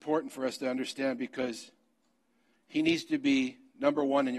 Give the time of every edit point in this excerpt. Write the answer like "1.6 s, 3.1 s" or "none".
none